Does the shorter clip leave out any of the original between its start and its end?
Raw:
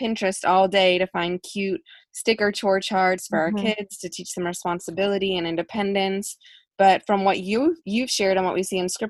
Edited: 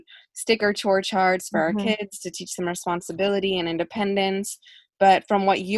no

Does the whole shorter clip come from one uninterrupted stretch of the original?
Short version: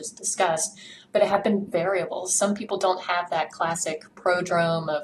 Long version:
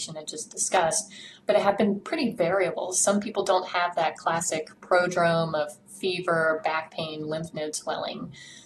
no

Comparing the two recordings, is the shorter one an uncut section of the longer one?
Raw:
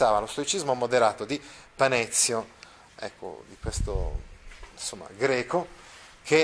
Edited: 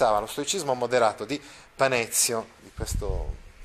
no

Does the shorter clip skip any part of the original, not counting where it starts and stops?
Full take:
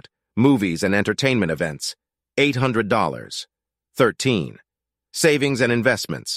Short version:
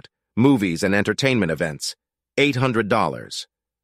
no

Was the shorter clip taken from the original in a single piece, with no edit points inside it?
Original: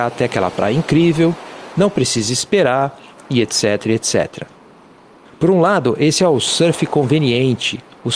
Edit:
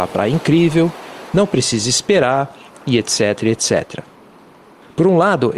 yes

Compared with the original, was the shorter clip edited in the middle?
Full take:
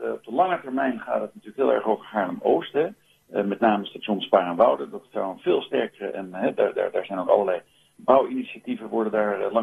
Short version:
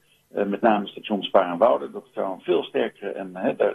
no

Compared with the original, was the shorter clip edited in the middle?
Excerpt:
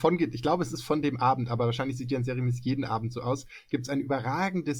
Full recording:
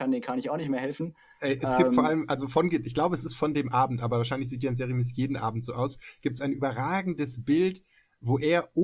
no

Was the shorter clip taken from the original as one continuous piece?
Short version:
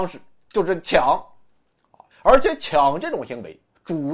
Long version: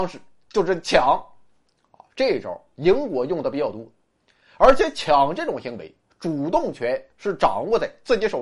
no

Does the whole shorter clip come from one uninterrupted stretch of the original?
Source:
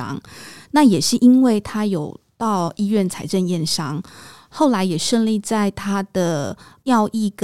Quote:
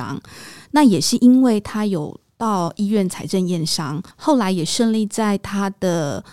no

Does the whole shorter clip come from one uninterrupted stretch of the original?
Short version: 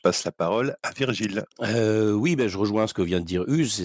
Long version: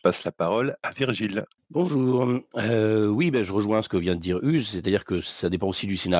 no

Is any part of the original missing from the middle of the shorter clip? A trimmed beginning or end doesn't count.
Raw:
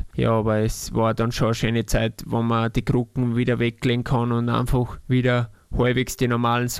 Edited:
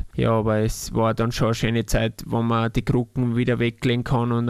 no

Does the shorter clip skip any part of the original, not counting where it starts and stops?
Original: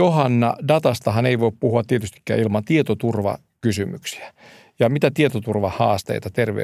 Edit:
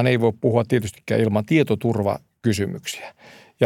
no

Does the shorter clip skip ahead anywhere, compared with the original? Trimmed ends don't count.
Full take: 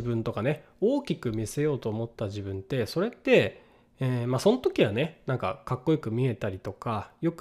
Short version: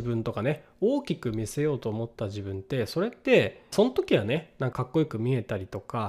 yes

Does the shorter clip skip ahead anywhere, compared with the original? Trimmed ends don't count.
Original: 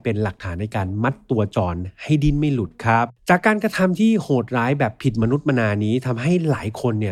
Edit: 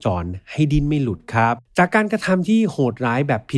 no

